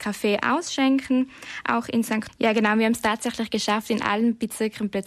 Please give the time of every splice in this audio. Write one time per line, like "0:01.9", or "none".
0:02.3